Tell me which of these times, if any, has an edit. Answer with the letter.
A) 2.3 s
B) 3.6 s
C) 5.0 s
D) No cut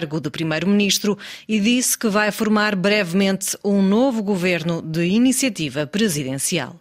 D